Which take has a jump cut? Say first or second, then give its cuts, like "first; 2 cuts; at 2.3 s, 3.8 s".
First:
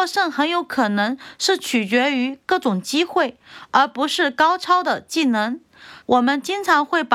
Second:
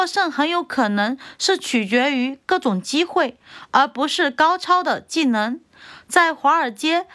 first; 1 cut; at 6.0 s